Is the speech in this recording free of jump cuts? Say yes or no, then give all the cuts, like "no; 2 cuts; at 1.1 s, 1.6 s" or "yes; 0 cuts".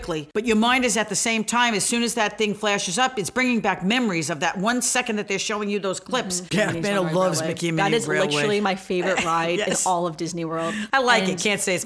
no; 1 cut; at 6.5 s